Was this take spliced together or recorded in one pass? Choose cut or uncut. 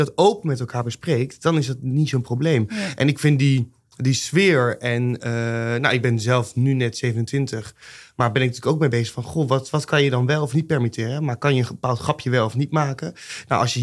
uncut